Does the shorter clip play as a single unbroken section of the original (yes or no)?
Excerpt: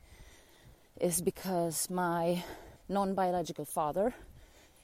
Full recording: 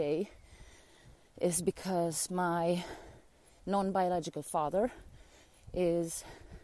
no